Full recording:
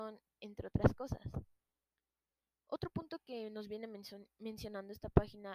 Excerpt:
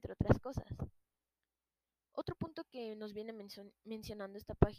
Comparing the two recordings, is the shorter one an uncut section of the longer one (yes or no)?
yes